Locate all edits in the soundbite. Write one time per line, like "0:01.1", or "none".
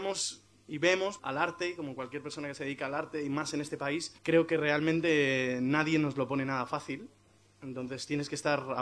0:01.2
0:04.2